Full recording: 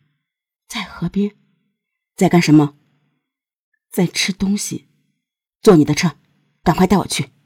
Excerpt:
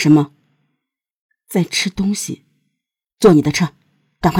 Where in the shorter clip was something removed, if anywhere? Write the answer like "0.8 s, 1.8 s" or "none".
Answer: none